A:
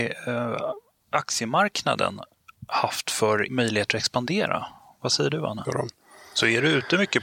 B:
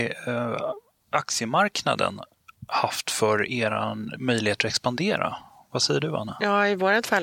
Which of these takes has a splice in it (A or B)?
A